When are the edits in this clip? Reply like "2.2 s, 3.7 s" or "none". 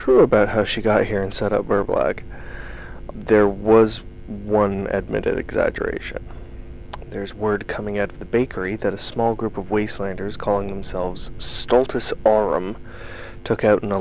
3.1 s, 7.0 s

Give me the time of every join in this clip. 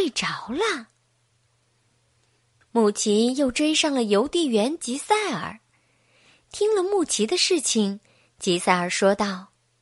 none

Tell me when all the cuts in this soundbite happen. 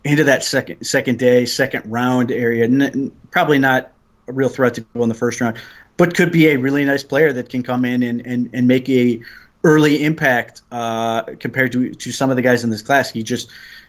none

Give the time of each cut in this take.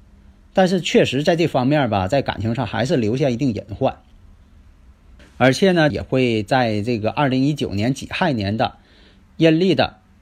5.9 s

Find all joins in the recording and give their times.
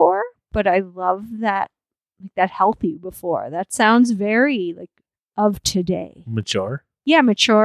none

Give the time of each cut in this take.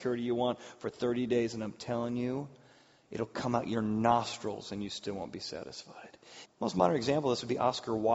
6.5 s

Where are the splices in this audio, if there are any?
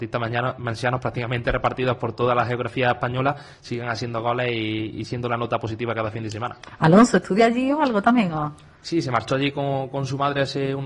none

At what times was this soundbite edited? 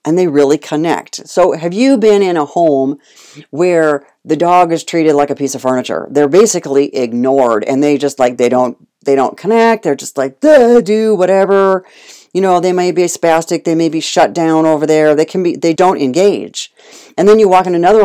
15.8 s

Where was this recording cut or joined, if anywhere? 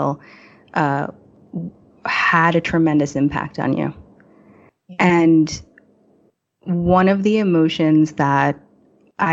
none

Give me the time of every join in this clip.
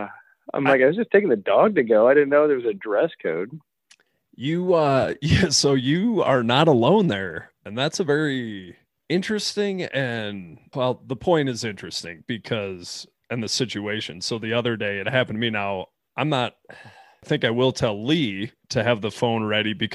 10.7 s

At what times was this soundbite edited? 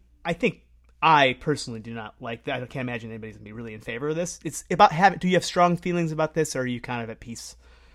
none

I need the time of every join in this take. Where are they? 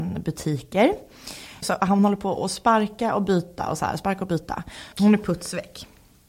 1.6 s, 4.9 s

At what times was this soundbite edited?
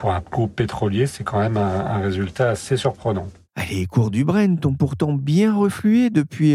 none

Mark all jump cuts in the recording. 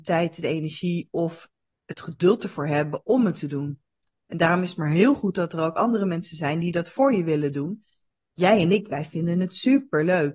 none

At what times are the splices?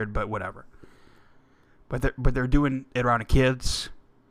none

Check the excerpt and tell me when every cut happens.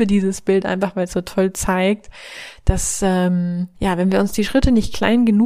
3.8 s

